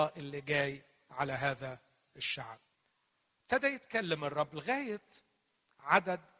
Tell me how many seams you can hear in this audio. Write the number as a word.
zero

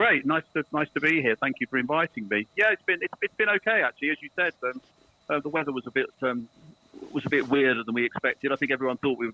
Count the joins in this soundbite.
zero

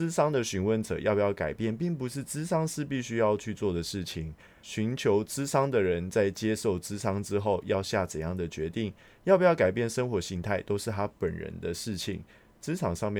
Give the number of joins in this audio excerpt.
zero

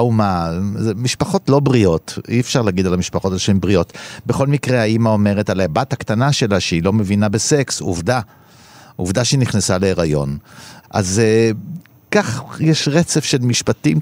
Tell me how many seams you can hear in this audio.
zero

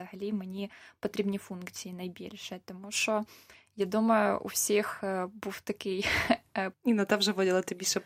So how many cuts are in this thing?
one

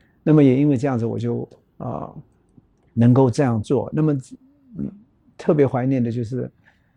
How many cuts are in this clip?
zero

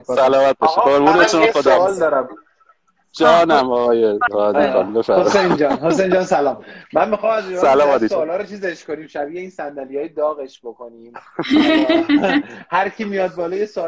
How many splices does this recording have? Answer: zero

